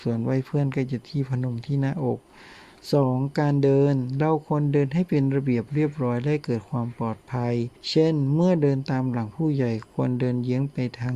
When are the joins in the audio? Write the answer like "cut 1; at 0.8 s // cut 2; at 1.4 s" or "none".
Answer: cut 1; at 7.8 s